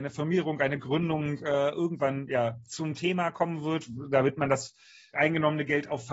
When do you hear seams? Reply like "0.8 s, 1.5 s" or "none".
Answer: 5.1 s